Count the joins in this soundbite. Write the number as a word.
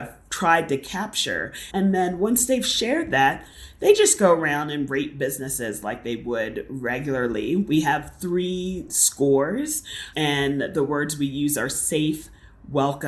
one